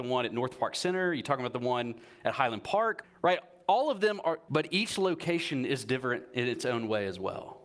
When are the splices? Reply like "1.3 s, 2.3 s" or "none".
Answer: 3.0 s, 4.5 s